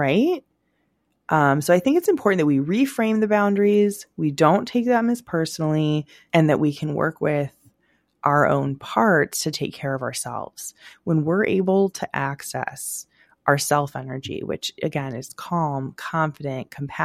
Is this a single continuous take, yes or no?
yes